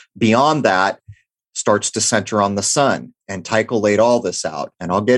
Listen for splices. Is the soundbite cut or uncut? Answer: uncut